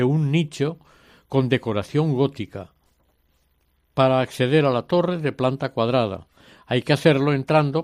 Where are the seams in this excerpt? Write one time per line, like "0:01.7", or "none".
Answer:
none